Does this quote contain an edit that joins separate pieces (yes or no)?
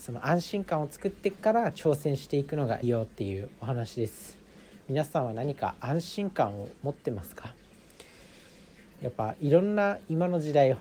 yes